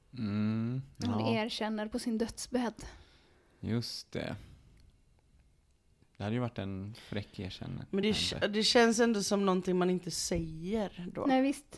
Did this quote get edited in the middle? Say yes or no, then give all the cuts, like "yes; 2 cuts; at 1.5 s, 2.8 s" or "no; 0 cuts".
no; 0 cuts